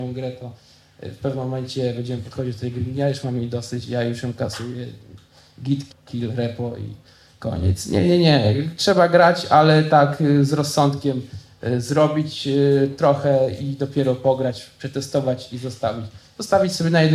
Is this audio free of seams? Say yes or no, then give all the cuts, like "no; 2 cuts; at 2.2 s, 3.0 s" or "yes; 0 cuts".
no; 1 cut; at 5.9 s